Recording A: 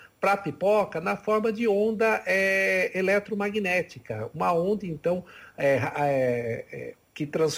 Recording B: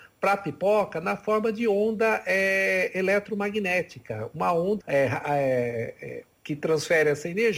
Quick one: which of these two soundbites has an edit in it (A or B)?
B